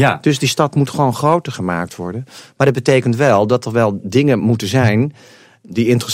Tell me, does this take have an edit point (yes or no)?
no